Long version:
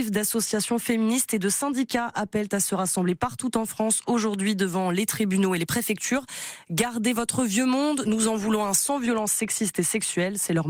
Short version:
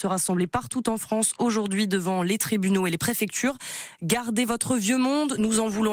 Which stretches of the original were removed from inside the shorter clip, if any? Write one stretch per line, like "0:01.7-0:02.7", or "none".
none